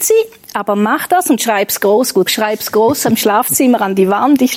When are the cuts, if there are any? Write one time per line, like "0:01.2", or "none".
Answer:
0:02.3